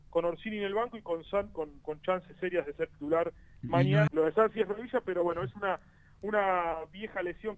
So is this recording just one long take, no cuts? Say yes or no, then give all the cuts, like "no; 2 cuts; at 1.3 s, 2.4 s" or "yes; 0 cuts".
no; 1 cut; at 4.1 s